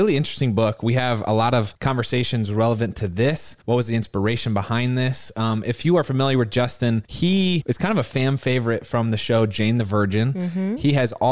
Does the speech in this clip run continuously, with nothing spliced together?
yes; 0 cuts

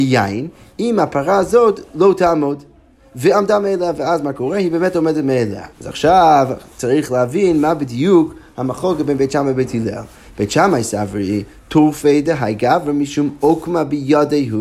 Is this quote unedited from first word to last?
no; 1 cut; at 5.7 s

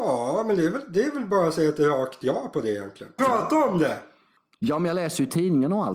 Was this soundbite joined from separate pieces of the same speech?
yes; 1 cut; at 3.2 s

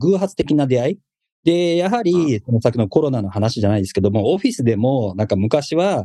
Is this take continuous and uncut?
yes; 0 cuts

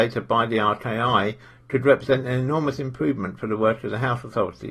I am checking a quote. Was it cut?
no; 0 cuts

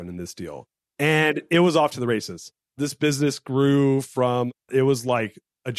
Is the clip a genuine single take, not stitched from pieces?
no; 1 cut; at 4.7 s

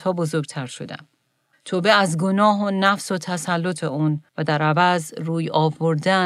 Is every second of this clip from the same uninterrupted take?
no; 2 cuts; at 1.5 s, 4.3 s

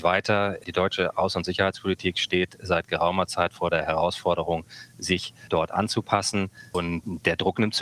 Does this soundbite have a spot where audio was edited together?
no; 0 cuts

